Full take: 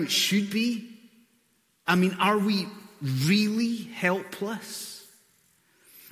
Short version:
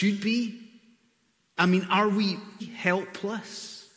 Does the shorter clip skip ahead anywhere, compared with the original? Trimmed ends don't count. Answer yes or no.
yes